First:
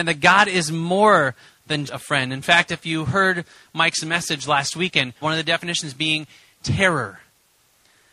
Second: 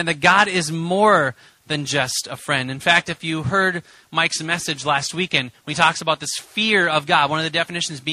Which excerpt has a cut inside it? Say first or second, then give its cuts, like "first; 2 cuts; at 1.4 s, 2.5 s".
first; 2 cuts; at 1.9 s, 5.2 s